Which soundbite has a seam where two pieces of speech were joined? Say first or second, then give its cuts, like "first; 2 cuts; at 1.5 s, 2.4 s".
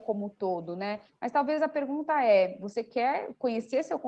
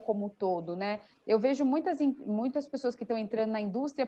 first; 1 cut; at 1.1 s